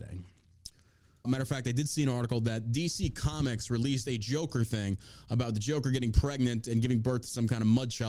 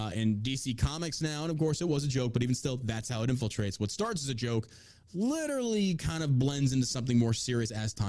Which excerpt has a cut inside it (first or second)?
first